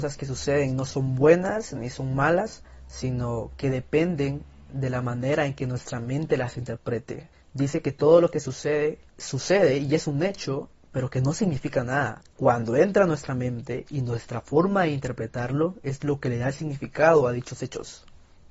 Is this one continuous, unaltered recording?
yes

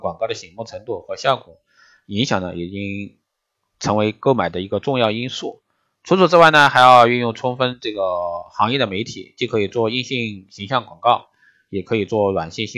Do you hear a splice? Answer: no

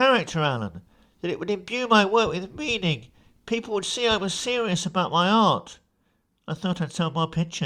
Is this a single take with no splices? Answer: yes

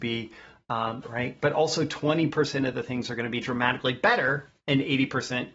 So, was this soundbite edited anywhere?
yes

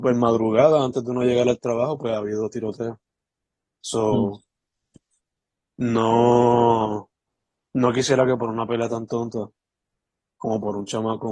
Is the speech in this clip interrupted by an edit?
no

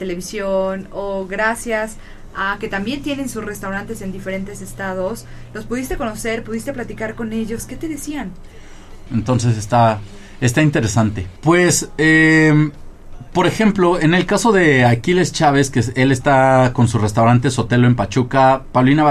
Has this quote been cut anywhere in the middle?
yes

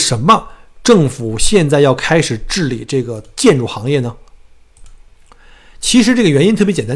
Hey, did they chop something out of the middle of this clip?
no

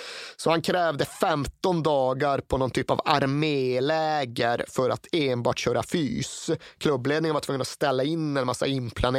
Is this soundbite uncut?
yes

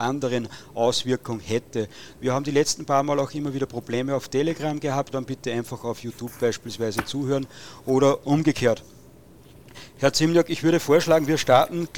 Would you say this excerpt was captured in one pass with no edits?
no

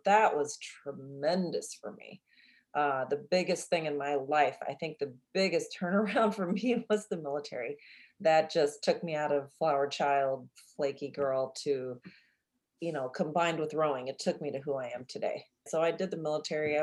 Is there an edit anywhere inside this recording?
yes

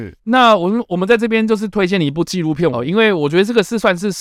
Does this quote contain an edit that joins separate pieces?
yes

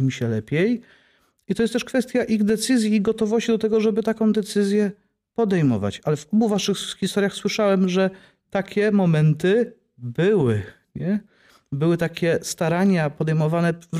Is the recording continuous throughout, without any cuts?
yes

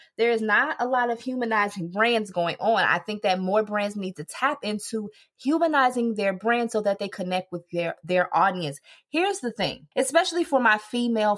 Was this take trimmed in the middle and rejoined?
yes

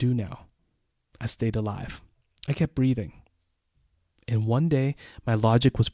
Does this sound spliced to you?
yes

